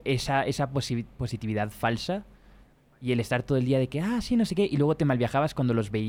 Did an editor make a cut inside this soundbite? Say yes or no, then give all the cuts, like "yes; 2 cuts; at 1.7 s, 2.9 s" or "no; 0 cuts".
no; 0 cuts